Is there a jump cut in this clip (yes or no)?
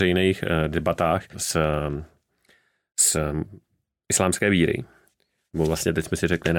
yes